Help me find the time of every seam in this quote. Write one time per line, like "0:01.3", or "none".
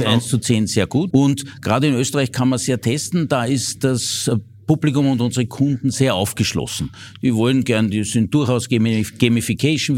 0:01.1

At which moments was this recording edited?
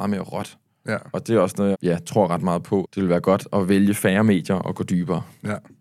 0:01.7
0:02.8

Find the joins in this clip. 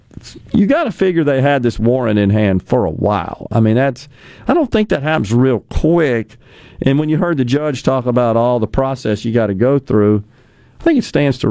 none

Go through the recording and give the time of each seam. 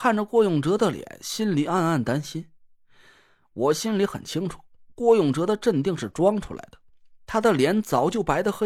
none

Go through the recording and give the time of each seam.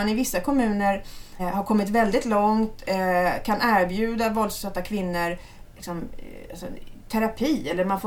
0:01.4

